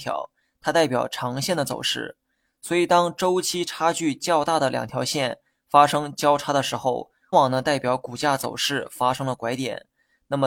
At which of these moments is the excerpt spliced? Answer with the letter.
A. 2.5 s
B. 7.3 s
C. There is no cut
B